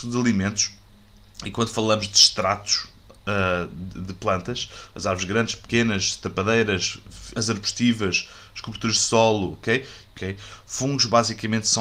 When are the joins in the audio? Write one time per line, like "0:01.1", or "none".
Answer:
0:07.3
0:10.1